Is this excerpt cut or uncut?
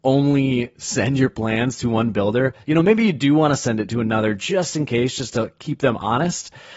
uncut